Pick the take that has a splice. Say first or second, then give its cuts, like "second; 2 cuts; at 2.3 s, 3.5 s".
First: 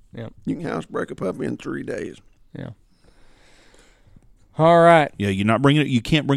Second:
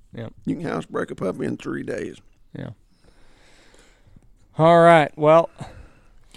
first; 1 cut; at 5.1 s